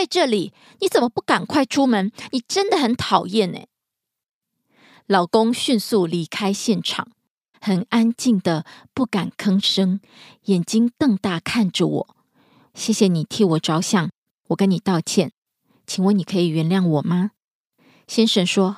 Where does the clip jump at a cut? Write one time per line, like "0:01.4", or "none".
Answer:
0:07.5
0:12.7